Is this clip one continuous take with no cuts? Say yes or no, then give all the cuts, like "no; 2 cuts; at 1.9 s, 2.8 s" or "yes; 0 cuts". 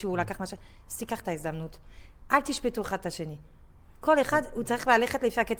yes; 0 cuts